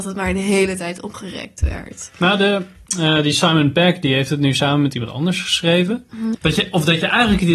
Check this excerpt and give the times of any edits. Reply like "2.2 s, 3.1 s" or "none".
6.3 s